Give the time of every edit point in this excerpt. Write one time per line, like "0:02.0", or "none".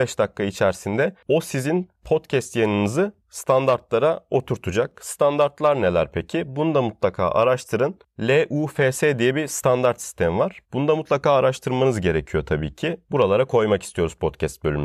0:10.6
0:13.1

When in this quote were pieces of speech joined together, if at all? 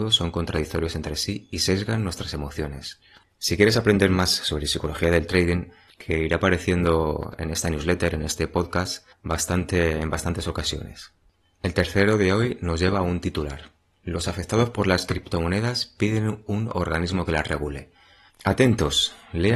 0:05.9
0:18.3

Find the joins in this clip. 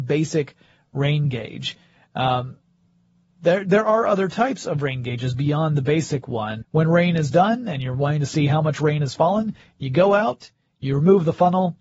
0:06.6

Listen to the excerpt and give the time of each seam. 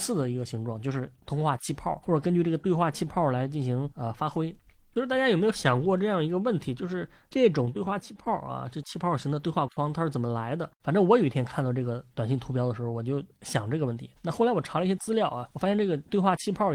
0:10.8

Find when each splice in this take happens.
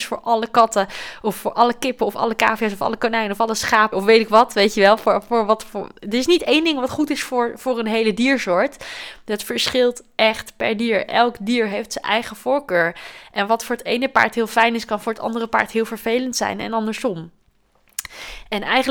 0:03.9

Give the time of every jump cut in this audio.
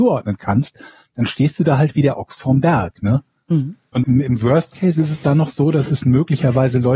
0:04.0

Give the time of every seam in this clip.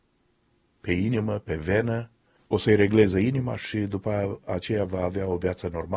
0:02.4

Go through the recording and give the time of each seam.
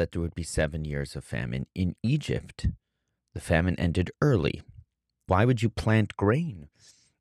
0:05.3

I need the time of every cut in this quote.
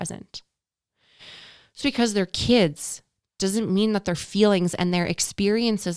0:01.8

